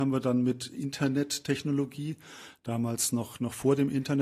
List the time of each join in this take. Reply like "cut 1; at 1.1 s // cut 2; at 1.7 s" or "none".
none